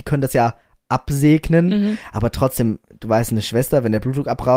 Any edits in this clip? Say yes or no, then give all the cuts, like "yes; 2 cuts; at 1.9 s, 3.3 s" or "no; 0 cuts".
no; 0 cuts